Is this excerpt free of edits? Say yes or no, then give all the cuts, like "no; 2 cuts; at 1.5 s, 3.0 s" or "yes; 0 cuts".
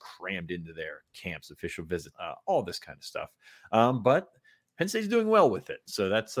no; 1 cut; at 2.1 s